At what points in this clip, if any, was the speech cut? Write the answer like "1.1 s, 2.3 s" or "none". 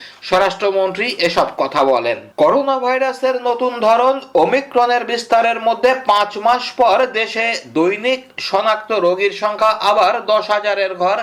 2.3 s